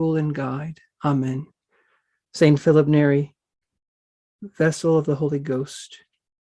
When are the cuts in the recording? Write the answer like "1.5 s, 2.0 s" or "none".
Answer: 2.2 s